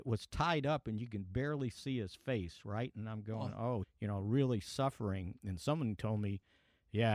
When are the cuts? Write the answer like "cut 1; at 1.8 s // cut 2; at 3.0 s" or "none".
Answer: cut 1; at 3.8 s